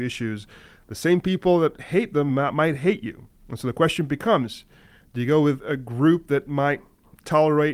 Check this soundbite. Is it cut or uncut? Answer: uncut